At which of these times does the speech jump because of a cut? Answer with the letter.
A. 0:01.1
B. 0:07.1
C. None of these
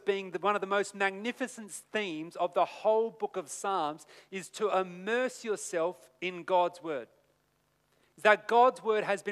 C